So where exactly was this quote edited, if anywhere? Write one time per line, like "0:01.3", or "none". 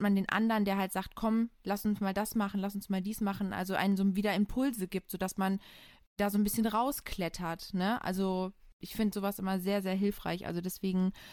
none